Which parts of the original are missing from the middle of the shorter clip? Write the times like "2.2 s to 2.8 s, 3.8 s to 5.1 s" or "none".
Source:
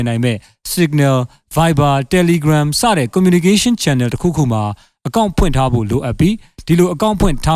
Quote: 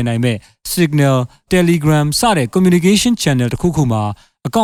1.5 s to 2.1 s